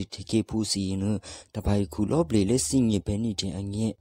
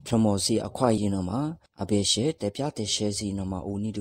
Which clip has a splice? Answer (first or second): second